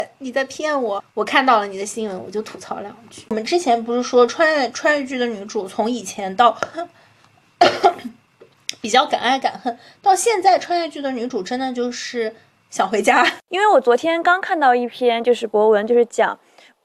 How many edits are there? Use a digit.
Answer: 2